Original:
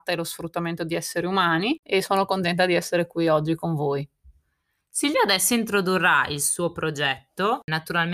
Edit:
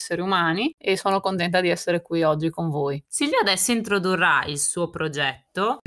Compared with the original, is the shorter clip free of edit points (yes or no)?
no